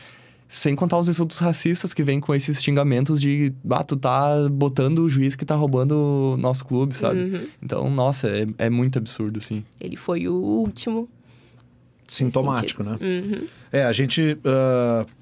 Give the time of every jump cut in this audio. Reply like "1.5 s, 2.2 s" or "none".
9.7 s